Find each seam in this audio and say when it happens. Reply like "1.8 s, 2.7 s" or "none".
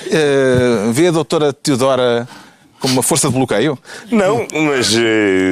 none